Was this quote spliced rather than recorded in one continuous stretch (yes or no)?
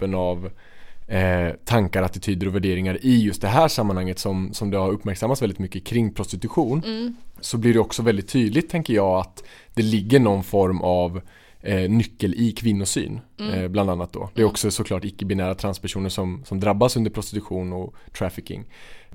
no